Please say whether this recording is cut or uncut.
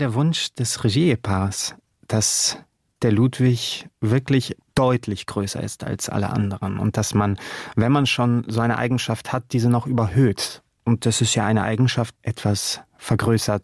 cut